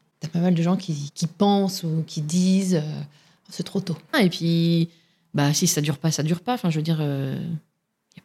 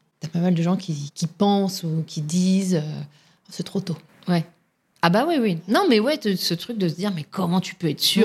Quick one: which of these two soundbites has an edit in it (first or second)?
first